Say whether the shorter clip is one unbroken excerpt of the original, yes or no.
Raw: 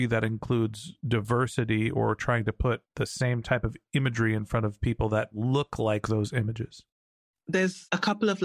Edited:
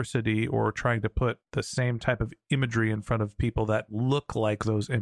yes